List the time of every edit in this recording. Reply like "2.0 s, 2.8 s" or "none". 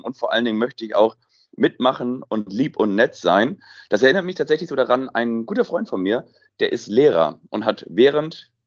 none